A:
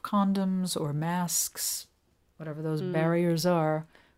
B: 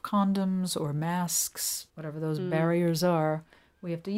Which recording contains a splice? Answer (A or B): B